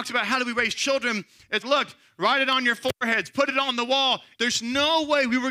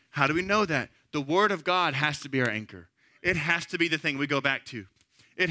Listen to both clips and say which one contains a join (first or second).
first